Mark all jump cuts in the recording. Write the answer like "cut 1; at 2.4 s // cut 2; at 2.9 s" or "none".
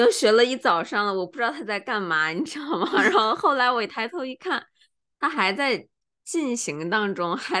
none